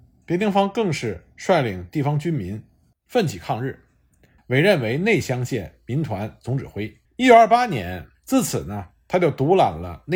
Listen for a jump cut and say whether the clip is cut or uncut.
cut